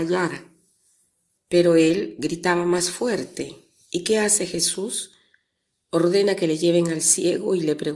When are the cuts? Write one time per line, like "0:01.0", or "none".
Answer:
none